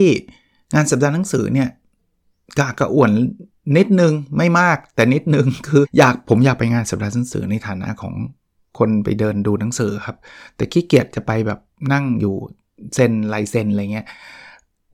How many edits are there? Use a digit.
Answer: 1